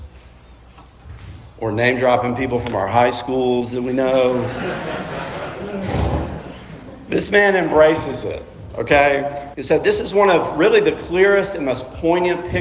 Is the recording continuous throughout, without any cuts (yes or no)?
no